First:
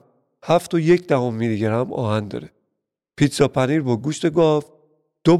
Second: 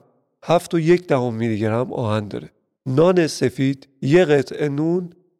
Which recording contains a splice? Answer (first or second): second